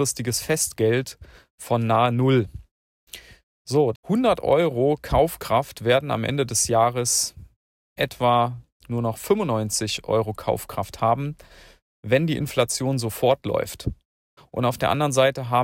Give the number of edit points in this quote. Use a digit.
2